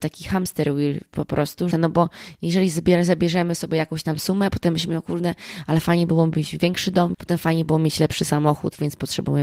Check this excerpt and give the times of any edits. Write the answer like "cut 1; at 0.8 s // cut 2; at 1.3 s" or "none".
cut 1; at 1.7 s // cut 2; at 7.1 s